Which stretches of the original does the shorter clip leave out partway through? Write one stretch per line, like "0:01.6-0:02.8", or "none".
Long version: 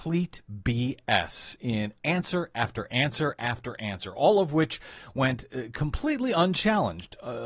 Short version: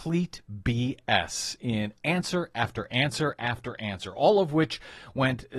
none